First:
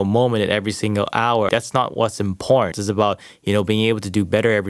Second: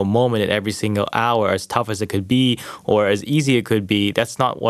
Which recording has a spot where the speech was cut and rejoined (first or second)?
first